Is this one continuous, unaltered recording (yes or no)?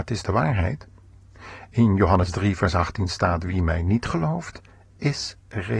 yes